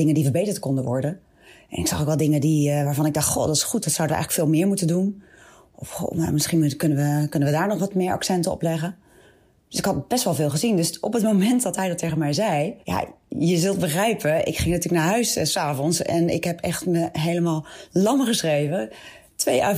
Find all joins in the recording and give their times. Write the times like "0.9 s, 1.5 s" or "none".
12.8 s